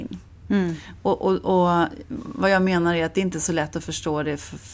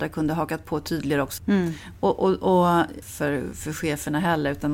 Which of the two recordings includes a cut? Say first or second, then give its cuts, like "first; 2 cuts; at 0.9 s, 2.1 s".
second; 2 cuts; at 1.4 s, 3.0 s